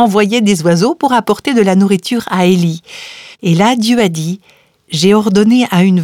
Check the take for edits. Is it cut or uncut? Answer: cut